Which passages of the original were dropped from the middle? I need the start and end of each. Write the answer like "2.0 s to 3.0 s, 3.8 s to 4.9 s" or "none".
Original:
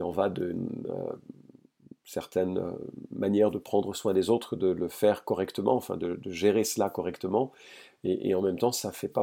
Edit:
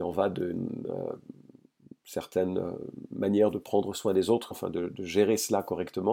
4.5 s to 5.8 s